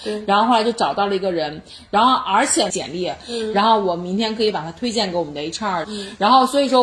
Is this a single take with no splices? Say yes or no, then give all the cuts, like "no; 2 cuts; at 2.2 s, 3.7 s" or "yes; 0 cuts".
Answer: no; 2 cuts; at 2.7 s, 5.8 s